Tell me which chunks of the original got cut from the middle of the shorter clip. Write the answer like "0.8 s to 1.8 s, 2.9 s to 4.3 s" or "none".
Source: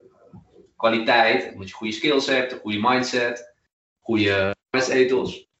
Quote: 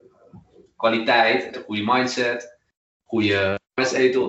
1.5 s to 2.5 s